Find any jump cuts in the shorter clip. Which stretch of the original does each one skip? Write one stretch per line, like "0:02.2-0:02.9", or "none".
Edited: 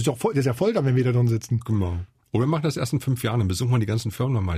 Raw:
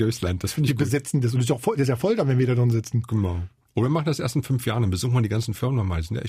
none